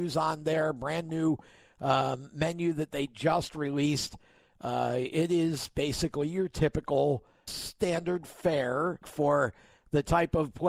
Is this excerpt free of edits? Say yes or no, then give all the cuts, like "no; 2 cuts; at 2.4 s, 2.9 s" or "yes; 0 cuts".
no; 2 cuts; at 7.5 s, 9.0 s